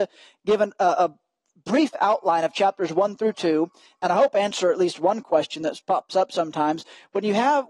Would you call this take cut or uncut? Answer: uncut